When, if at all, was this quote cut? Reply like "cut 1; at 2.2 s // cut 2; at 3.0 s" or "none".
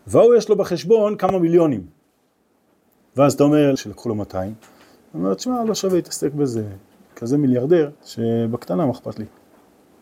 cut 1; at 3.8 s // cut 2; at 8.0 s